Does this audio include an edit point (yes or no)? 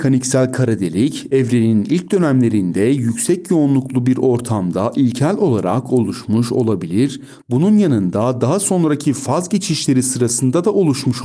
no